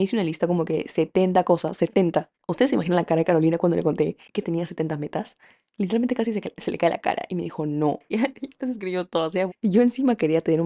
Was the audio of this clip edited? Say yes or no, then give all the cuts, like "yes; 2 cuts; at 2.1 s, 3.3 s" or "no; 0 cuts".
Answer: yes; 2 cuts; at 8.1 s, 9.5 s